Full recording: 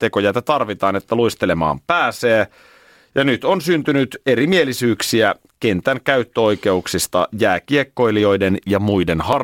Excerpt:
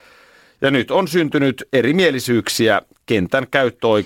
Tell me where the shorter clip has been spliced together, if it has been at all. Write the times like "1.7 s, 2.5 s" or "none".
none